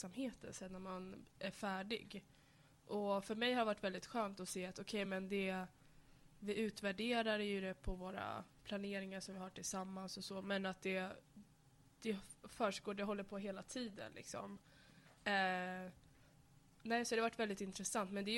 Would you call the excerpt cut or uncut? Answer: uncut